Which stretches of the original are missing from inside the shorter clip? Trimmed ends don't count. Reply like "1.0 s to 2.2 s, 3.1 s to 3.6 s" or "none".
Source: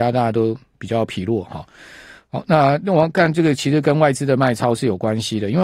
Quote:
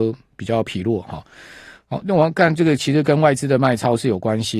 2.4 s to 2.8 s